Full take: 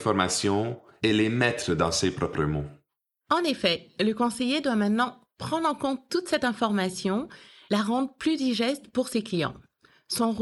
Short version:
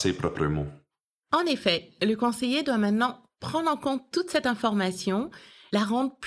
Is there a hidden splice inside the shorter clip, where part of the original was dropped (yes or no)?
no